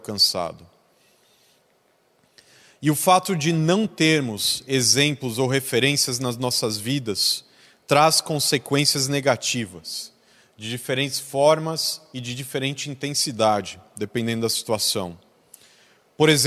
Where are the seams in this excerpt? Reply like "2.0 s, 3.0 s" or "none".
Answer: none